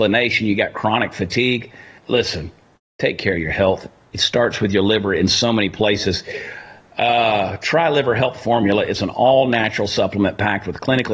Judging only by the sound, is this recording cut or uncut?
cut